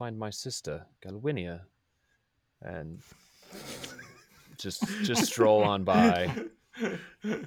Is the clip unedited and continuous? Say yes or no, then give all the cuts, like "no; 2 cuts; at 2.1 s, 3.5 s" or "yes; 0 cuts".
yes; 0 cuts